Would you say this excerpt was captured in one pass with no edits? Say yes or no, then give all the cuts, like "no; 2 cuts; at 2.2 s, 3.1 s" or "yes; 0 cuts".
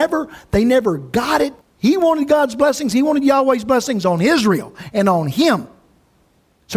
no; 1 cut; at 1.6 s